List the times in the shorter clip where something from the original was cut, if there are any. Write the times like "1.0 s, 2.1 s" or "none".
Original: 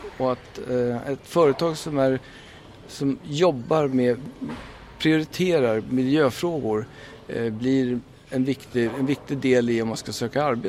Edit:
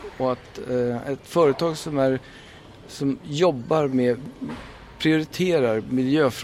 none